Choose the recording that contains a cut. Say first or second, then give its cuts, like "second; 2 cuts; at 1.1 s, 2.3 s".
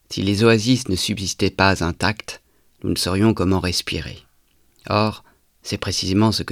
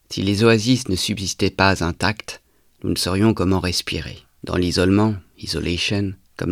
second; 1 cut; at 4.4 s